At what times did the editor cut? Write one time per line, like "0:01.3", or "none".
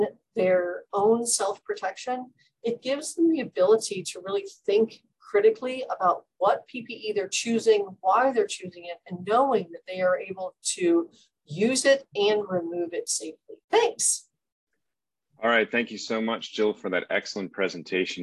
0:13.6